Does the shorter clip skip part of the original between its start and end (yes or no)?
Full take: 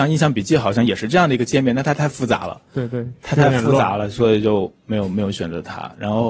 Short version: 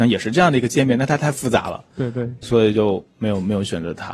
yes